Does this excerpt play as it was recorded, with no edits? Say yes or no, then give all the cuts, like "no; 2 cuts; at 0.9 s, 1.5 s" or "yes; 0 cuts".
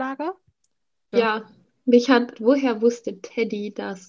no; 2 cuts; at 1.1 s, 2.3 s